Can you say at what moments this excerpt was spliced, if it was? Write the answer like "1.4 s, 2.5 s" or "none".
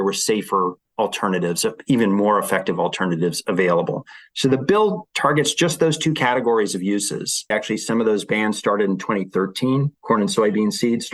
7.5 s